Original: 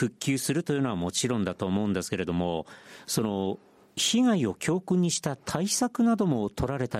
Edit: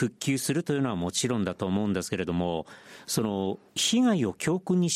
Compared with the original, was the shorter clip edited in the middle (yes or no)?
yes